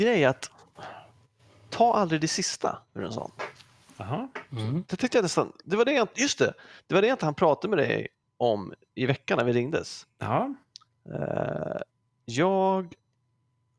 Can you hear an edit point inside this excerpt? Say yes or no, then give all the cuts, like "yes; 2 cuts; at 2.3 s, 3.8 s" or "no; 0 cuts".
yes; 1 cut; at 4.8 s